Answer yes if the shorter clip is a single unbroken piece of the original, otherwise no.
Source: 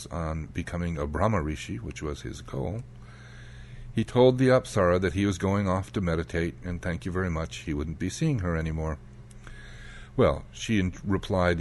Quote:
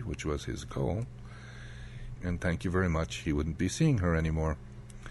no